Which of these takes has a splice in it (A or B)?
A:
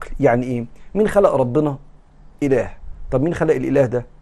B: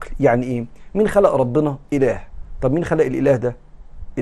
B